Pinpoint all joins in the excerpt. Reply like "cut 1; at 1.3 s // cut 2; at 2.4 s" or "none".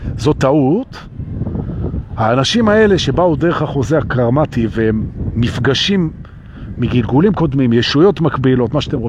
none